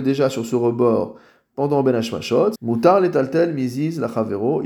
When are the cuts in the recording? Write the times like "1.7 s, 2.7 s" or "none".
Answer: 2.5 s